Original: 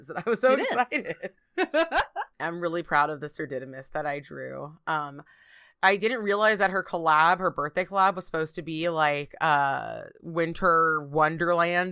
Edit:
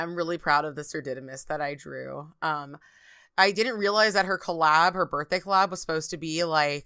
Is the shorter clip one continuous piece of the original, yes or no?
yes